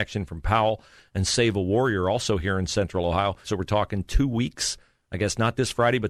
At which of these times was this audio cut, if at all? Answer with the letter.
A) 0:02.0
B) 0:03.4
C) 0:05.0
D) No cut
B